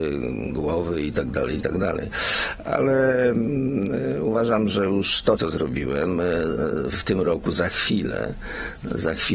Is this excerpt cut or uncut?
cut